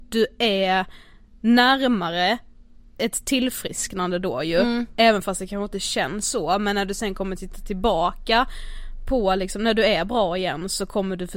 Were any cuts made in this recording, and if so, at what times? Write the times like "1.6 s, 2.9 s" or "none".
none

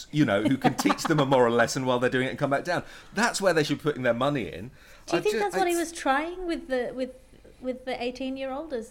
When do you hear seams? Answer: none

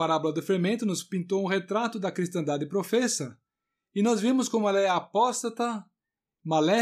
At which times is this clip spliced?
none

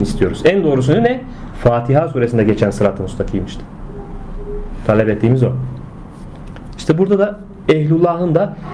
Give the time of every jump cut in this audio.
none

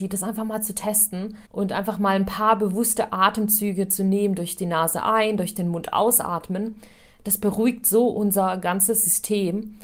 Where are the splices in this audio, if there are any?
1.5 s

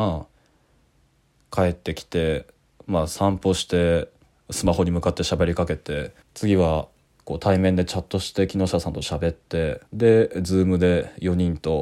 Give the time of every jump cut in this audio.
6.2 s, 9.9 s

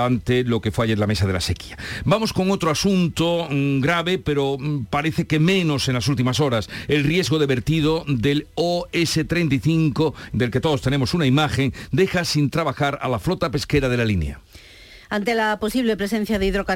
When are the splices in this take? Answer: 10.3 s

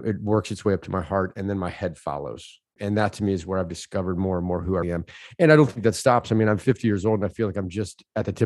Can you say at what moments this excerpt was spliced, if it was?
2.8 s, 4.8 s

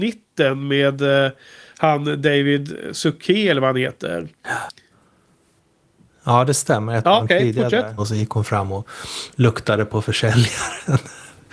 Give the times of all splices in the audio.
8.0 s

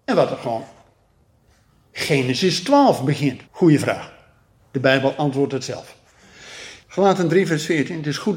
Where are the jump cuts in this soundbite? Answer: 3.4 s, 6.8 s

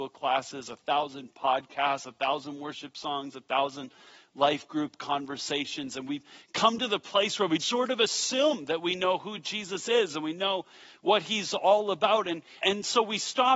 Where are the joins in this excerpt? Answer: 7.6 s, 12.6 s

